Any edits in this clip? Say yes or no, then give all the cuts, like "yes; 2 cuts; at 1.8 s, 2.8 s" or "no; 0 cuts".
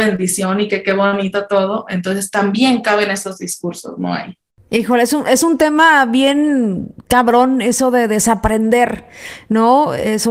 no; 0 cuts